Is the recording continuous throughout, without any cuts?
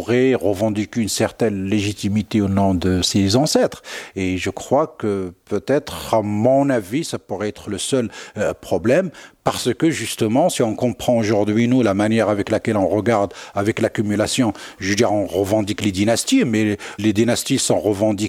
yes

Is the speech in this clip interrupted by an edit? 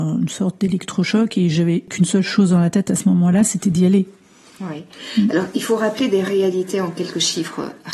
no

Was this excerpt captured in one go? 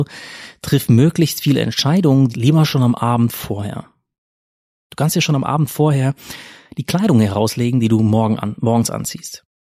no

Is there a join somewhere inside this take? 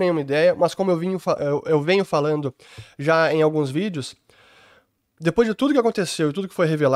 no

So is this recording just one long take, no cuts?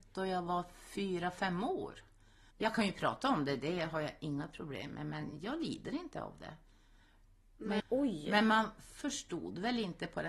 no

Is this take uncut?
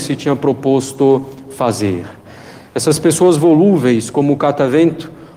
yes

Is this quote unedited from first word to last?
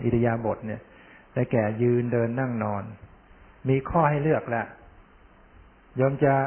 yes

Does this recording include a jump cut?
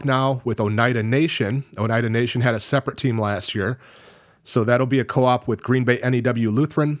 no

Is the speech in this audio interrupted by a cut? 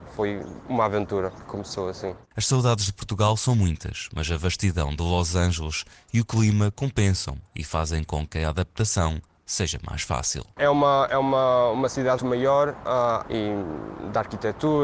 yes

